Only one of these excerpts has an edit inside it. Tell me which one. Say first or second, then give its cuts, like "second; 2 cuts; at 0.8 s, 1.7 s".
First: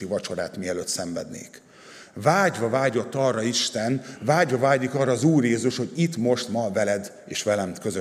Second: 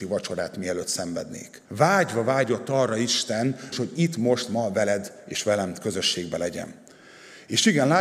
second; 2 cuts; at 1.7 s, 3.7 s